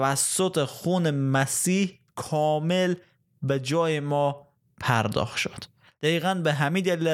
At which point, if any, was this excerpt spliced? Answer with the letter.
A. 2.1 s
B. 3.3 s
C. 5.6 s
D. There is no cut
A